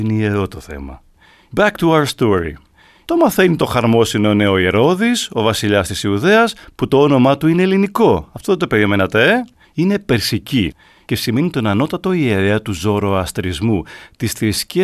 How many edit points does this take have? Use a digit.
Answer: 1